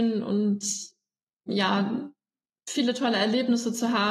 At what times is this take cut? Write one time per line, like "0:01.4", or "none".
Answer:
none

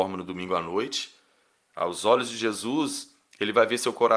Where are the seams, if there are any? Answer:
none

